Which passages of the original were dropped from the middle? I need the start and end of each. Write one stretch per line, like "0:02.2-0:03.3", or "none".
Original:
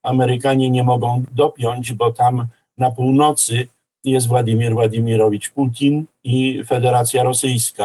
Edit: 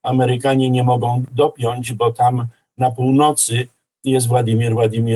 none